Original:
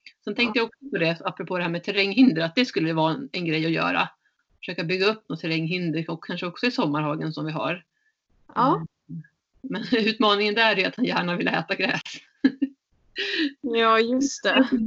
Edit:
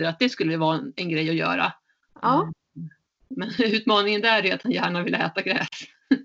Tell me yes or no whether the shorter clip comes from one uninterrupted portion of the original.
no